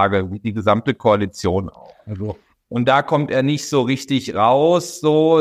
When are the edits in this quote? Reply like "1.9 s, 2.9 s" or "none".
none

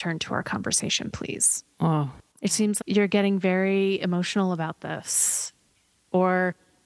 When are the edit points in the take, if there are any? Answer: 1.7 s, 2.8 s

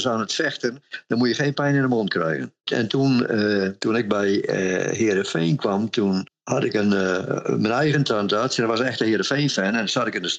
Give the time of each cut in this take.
3.8 s

